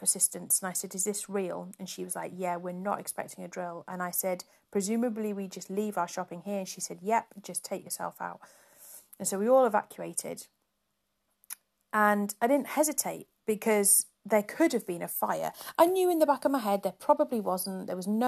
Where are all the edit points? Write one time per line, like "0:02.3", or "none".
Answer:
none

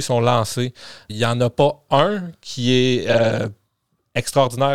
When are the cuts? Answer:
0:01.1

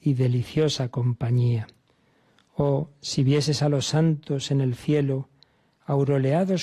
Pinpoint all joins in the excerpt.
none

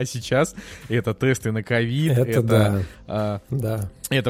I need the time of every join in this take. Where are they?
none

